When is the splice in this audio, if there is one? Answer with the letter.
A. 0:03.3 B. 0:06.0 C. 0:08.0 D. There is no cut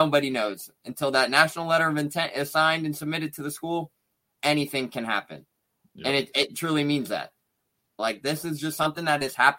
C